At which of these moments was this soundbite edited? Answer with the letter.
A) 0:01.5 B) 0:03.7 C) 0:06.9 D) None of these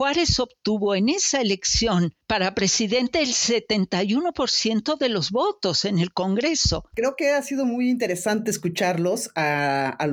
C